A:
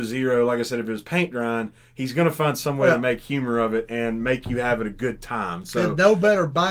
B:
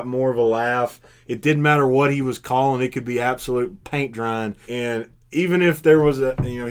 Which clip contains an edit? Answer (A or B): B